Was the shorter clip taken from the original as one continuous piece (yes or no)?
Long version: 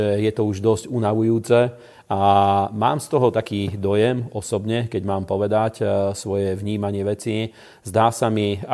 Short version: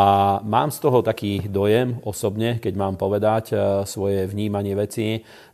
yes